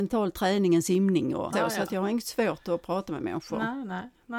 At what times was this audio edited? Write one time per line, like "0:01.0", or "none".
0:01.5